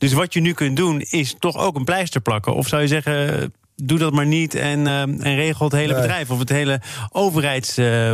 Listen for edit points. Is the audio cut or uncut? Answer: uncut